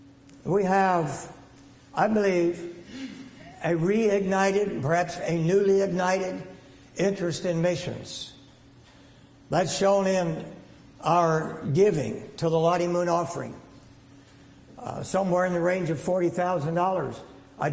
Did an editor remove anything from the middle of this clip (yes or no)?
no